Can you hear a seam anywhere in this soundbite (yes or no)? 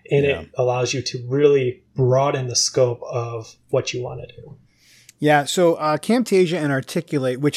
no